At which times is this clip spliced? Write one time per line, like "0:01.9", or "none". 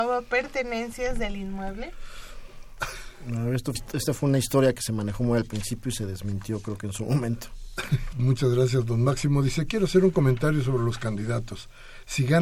0:03.7
0:08.1